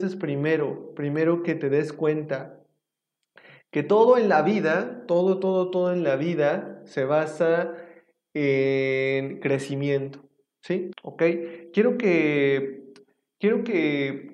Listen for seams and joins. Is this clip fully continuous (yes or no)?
no